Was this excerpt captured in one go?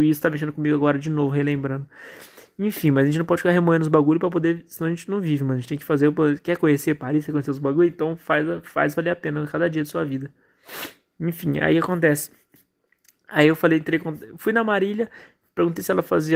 yes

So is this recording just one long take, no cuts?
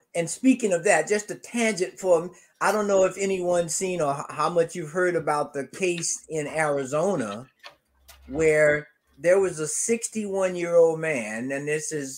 yes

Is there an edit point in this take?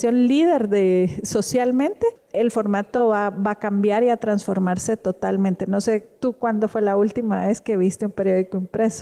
no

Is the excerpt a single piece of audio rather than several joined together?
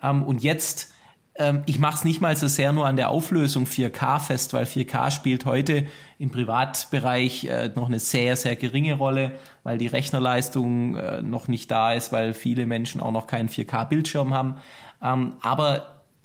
no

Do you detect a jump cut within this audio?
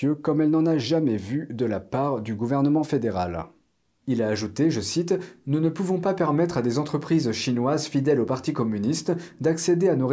no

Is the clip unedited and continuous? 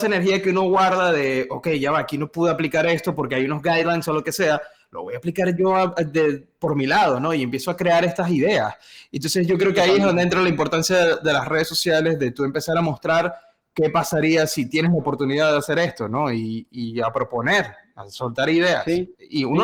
yes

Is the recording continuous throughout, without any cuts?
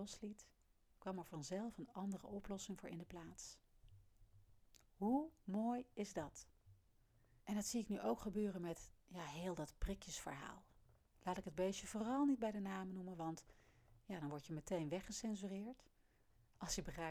no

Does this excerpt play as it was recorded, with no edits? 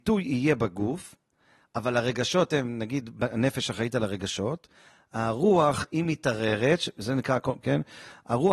no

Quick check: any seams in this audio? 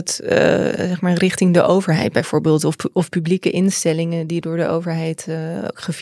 yes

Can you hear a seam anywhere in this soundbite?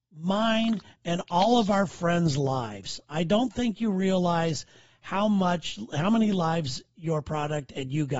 no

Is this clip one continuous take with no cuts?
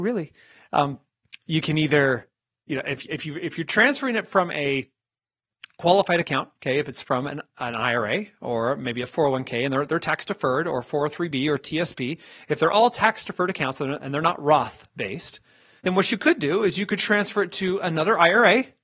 no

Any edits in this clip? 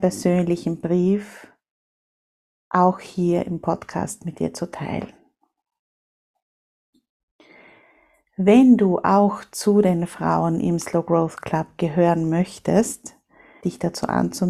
yes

